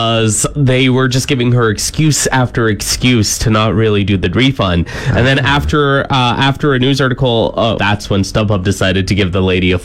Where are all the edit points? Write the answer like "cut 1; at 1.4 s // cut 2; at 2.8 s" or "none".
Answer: cut 1; at 7.8 s